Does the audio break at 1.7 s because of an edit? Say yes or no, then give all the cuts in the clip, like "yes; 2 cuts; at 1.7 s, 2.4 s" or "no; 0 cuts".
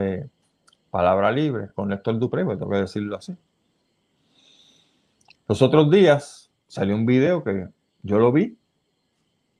no; 0 cuts